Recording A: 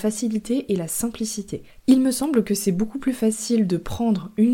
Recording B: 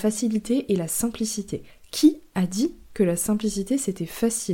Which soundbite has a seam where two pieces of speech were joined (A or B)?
A